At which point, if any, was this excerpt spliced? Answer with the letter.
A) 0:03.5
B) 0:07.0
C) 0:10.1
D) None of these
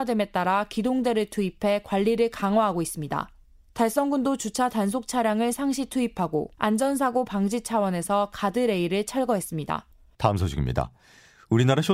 C